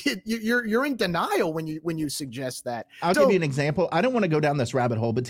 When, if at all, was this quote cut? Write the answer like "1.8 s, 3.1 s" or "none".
3.1 s